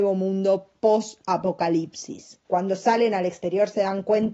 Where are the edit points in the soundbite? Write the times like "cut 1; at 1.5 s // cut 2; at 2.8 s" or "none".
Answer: cut 1; at 2.4 s